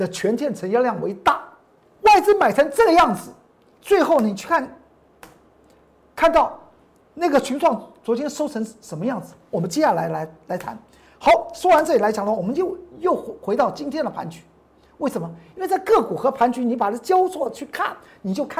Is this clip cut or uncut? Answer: cut